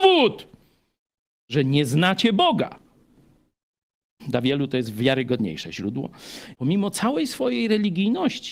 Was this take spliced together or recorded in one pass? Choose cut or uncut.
cut